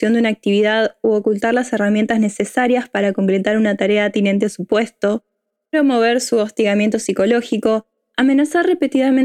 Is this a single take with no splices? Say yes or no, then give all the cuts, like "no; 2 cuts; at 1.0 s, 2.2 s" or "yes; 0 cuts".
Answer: yes; 0 cuts